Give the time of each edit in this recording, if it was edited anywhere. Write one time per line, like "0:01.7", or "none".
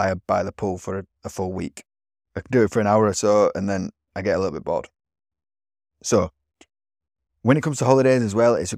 none